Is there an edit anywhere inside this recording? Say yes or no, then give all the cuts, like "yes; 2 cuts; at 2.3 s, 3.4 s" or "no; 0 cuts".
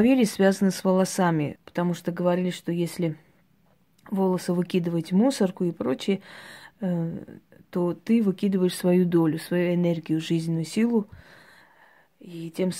yes; 2 cuts; at 1.6 s, 5.7 s